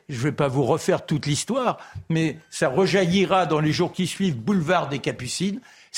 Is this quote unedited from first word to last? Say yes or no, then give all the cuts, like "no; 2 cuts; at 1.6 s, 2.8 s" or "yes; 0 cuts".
yes; 0 cuts